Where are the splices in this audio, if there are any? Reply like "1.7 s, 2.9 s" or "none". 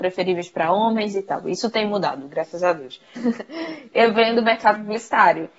3.1 s